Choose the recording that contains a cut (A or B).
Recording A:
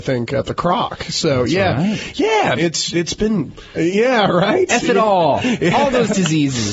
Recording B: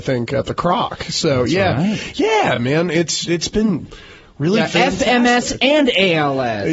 A